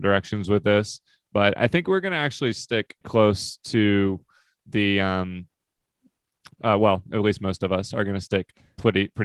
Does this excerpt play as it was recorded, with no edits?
no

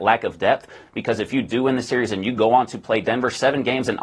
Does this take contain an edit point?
no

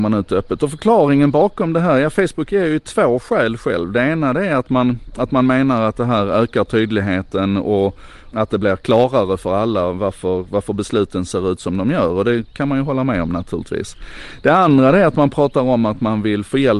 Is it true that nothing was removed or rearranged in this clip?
no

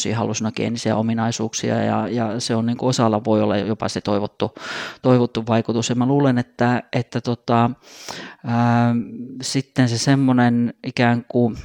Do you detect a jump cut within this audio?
no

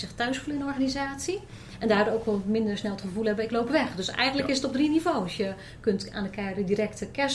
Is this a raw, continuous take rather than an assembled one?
yes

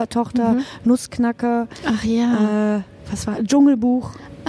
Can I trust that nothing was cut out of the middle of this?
yes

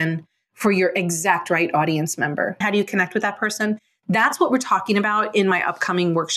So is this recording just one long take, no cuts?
no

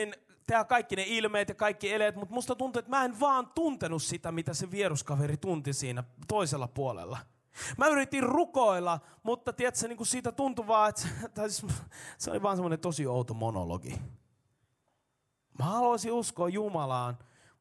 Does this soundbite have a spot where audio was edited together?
no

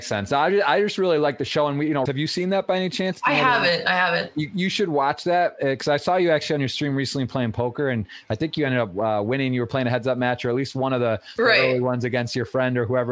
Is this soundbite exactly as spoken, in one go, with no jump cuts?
no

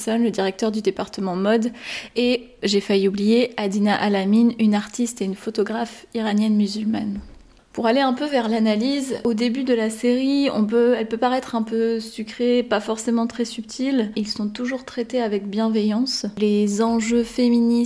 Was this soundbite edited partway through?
yes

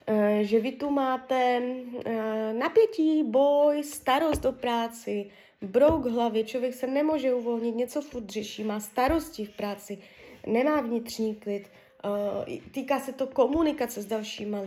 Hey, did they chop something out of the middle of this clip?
no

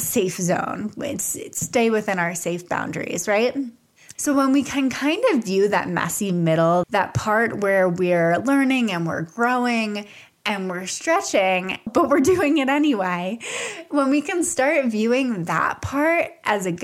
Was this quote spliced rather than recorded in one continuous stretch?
yes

